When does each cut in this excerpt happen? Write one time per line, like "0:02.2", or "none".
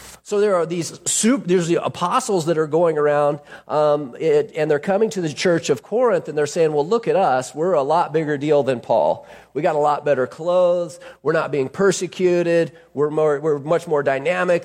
none